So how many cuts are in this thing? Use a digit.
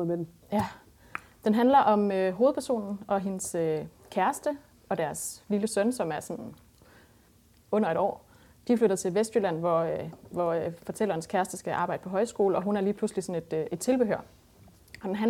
0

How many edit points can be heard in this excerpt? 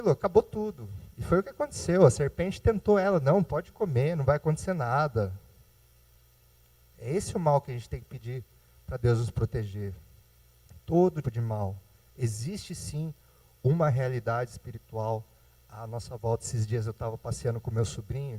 1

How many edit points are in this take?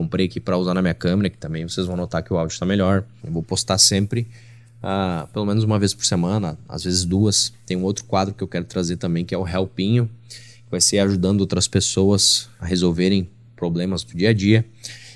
2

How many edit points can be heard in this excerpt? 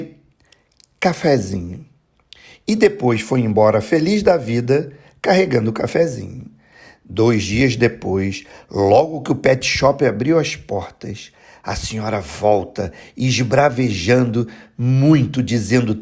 0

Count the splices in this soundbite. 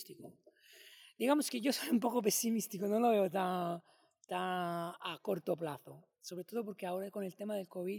0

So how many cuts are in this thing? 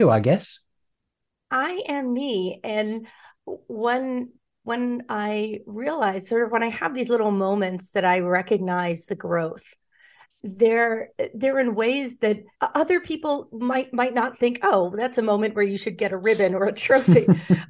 1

